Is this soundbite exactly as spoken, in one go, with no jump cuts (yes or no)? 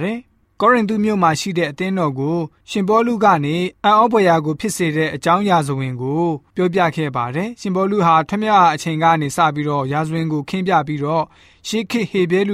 yes